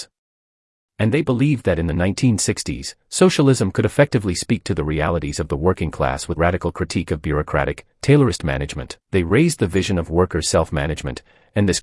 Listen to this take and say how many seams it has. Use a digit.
2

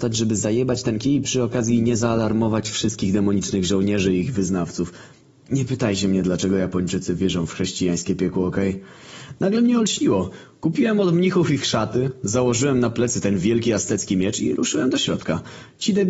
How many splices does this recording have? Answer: 0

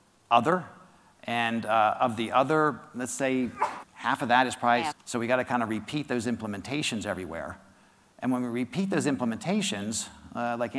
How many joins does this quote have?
2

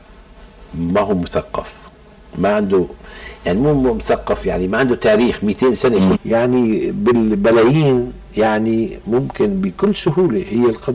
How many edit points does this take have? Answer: 2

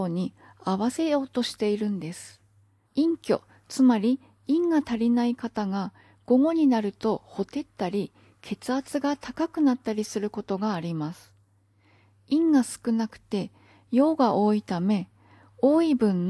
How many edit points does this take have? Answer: 1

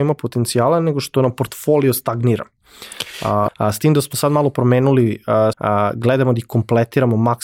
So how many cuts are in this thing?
2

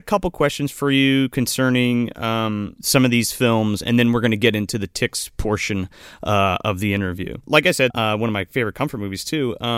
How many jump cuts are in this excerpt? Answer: 1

